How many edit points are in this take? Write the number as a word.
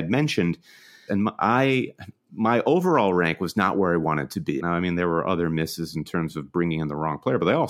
two